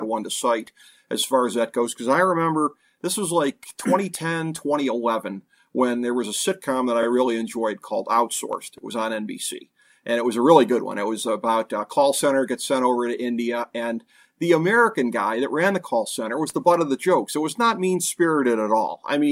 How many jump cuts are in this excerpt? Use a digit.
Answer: 0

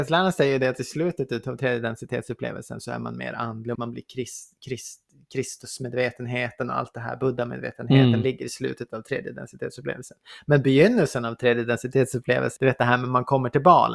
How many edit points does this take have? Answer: 2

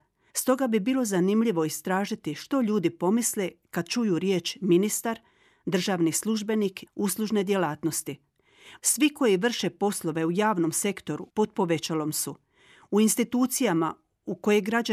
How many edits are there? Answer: 3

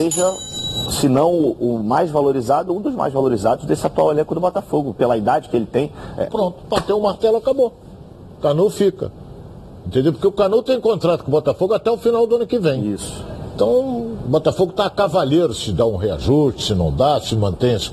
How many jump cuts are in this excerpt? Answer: 2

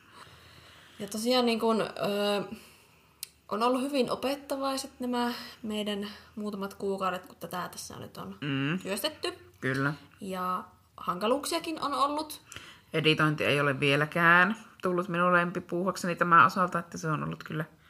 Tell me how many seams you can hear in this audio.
0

